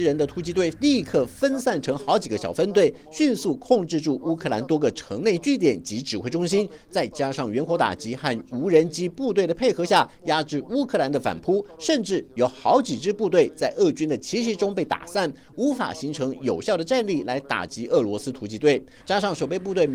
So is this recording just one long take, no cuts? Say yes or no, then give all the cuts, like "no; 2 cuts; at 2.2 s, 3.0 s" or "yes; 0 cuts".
no; 1 cut; at 19.0 s